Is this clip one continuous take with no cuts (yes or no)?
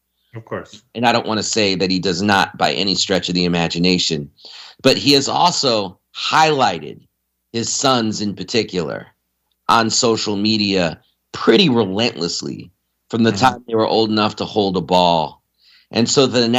yes